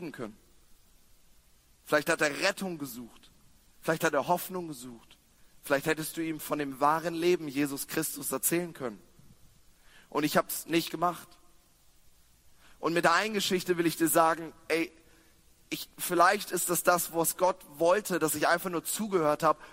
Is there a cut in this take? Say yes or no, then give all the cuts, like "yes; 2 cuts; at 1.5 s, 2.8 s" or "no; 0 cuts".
no; 0 cuts